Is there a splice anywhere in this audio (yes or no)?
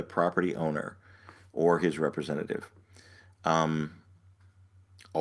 no